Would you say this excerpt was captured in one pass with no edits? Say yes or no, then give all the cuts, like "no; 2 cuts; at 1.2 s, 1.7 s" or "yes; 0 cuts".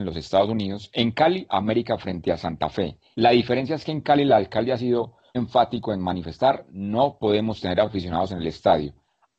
no; 2 cuts; at 3.1 s, 5.3 s